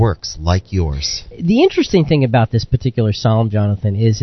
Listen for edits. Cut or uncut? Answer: uncut